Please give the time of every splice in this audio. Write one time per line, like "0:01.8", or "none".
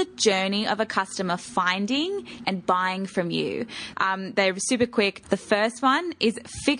0:02.4
0:03.9
0:05.2